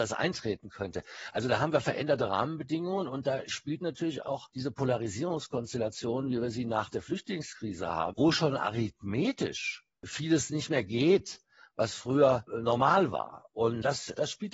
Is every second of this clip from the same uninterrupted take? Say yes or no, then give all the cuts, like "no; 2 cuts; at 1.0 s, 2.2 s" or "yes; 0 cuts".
no; 1 cut; at 8.1 s